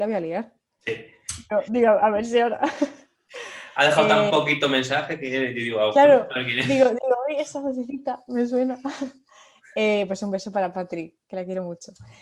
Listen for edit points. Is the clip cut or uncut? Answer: uncut